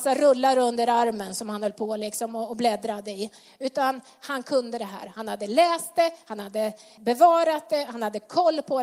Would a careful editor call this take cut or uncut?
cut